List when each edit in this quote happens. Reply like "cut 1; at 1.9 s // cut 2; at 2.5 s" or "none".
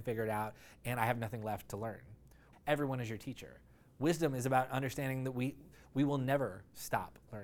cut 1; at 2.5 s